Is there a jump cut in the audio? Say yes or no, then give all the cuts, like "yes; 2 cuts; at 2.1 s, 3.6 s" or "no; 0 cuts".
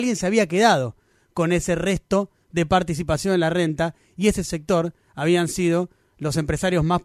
no; 0 cuts